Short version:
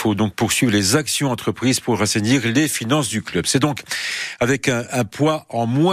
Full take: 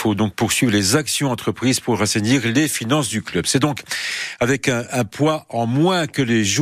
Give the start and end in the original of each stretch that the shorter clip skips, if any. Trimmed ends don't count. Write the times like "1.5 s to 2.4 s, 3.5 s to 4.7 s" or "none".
none

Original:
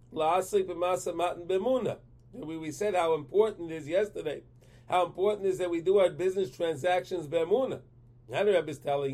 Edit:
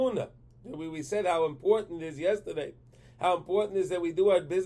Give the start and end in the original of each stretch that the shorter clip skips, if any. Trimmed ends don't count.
none

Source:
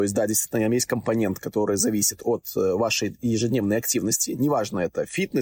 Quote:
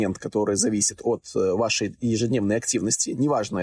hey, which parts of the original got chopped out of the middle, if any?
none

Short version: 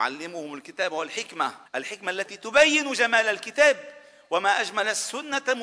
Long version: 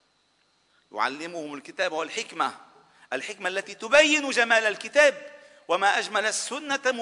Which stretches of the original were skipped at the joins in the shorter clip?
2.7 s to 3.0 s

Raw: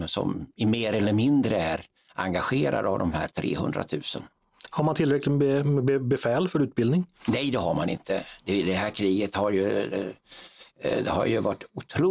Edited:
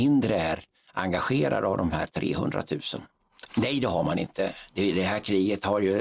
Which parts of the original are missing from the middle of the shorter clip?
4.7 s to 7.2 s

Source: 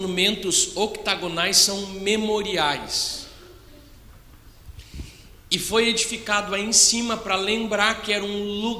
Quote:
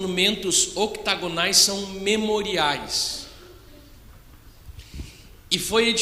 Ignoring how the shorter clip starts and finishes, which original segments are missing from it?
none

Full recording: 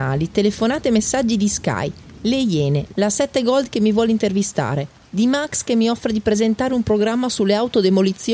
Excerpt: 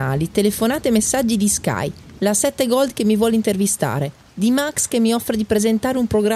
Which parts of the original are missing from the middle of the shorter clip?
2.2 s to 2.9 s

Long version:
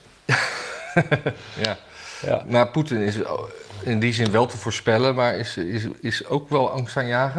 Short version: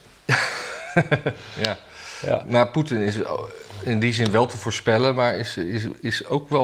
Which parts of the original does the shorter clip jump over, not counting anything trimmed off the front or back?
none

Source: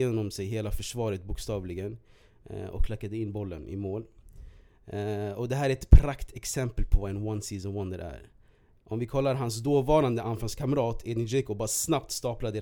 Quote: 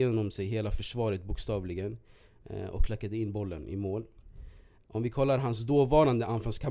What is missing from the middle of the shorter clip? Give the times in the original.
4.8 s to 8.7 s

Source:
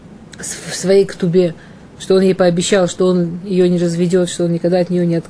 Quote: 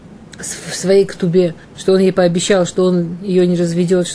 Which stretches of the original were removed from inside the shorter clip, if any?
1.6 s to 1.9 s

